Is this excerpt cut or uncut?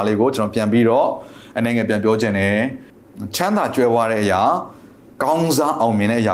uncut